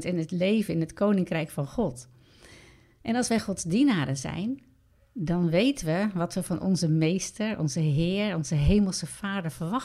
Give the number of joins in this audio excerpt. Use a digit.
0